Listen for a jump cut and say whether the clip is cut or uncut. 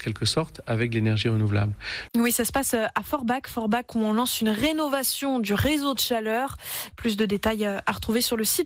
cut